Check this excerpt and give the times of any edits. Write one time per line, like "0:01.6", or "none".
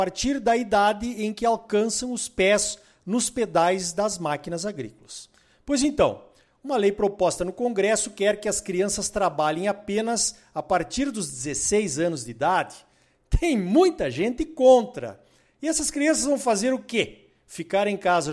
none

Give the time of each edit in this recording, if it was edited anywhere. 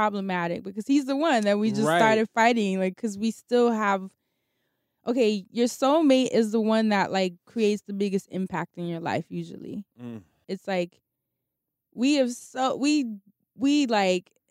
0:10.4

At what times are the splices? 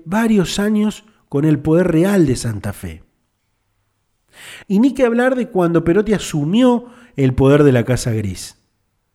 0:04.6

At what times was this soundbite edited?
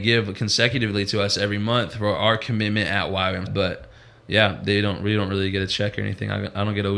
0:03.5

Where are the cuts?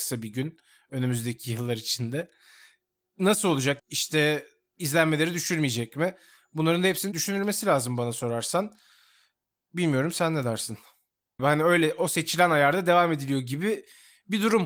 0:03.8
0:11.4

